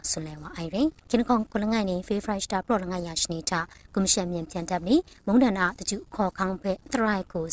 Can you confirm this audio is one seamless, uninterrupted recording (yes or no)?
no